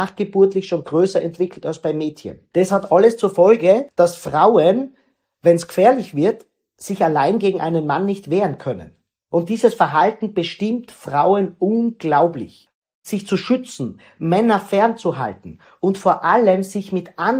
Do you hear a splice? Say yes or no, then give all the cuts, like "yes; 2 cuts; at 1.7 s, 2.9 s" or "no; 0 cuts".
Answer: no; 0 cuts